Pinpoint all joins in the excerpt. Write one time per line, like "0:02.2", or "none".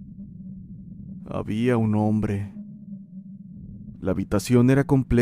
0:01.2
0:04.0